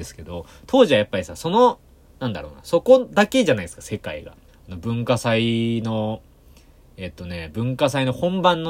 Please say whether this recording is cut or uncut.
cut